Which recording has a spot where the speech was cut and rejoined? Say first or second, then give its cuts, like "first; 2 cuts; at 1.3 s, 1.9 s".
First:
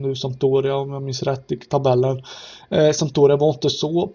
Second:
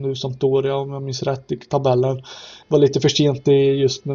second; 1 cut; at 2.6 s